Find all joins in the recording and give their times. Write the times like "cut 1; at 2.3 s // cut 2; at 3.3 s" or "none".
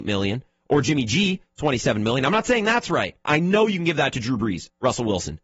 cut 1; at 3.2 s